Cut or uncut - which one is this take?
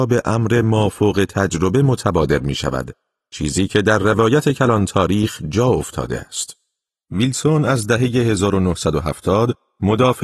cut